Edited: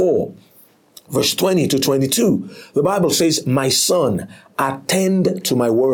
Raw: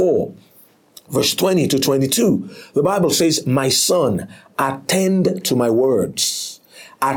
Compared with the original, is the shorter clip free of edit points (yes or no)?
yes